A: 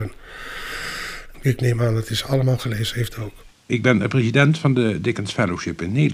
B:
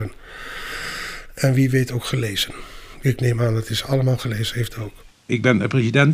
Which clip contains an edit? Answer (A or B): A